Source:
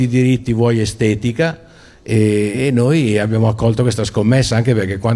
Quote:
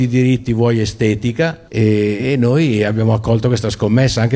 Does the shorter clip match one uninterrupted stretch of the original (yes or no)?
no